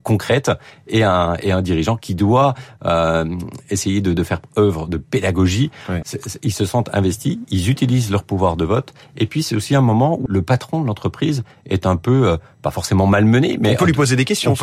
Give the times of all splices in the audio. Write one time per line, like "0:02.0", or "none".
0:06.0
0:10.3

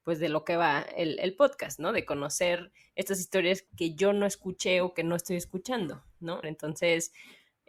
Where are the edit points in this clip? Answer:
0:06.4

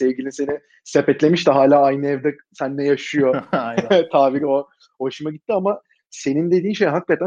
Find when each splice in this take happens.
none

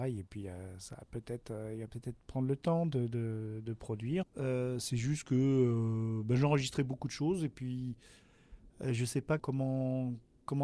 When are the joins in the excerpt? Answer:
0:04.2
0:09.4

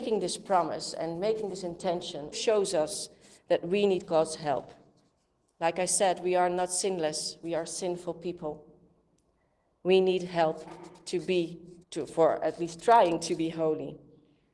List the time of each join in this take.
0:02.3
0:11.8

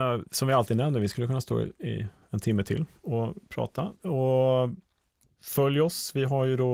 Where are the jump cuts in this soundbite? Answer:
0:03.9

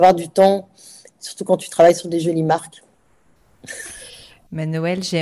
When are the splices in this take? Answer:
0:02.8

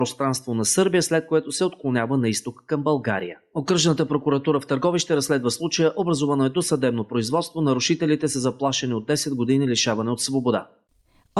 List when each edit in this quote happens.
none

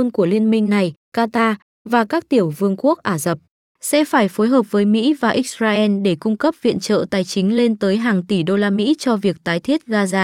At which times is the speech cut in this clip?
0:01.0

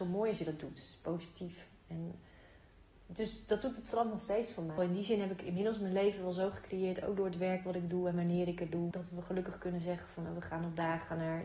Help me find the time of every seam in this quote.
0:04.8
0:08.9

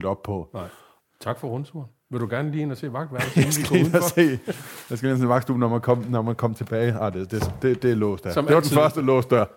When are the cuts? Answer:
none

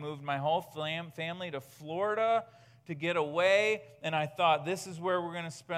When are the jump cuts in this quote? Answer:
none

